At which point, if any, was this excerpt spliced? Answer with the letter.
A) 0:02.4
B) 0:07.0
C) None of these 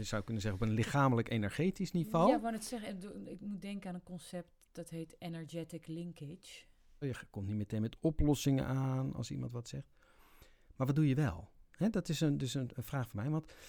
B